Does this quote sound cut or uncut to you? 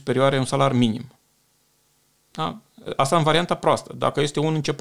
uncut